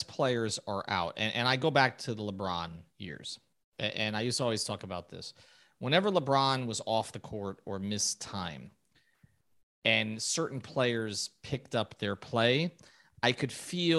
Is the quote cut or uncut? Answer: uncut